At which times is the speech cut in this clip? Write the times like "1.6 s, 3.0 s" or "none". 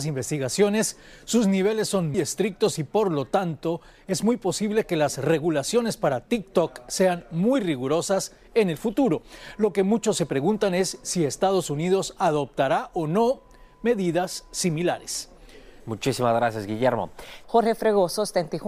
2.1 s, 15.8 s, 17.4 s